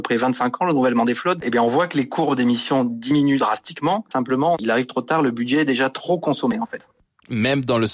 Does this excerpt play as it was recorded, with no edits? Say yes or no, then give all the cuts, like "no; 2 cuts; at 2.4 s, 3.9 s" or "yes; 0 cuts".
yes; 0 cuts